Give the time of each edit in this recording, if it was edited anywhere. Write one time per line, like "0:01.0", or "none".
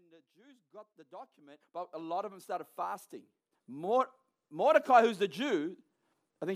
0:01.6
0:03.5